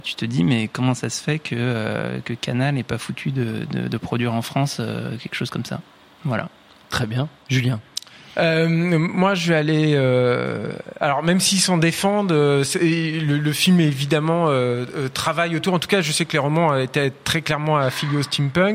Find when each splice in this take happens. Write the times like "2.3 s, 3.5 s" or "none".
none